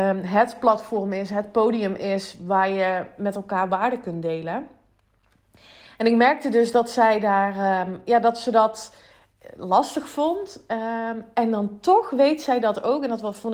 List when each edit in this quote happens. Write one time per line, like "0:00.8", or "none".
none